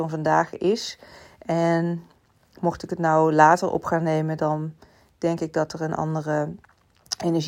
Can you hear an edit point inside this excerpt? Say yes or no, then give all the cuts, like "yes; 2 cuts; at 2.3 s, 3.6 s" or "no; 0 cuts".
no; 0 cuts